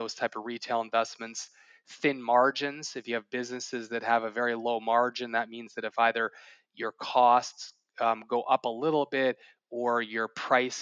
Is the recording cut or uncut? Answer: uncut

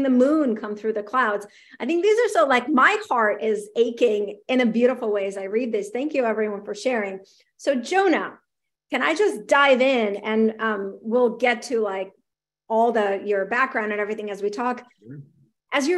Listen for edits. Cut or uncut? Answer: uncut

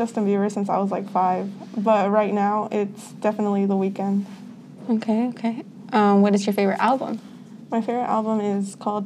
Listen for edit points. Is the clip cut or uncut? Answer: uncut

